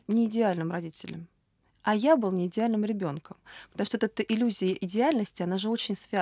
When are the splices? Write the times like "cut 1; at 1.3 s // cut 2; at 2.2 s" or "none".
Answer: none

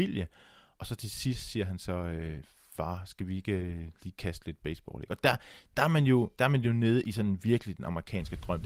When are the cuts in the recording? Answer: none

